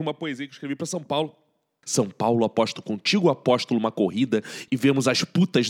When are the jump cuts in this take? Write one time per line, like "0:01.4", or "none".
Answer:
0:01.8